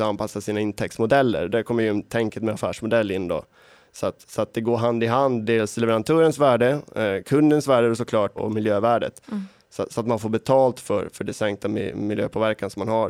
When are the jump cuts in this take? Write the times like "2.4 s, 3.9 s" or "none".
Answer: 8.4 s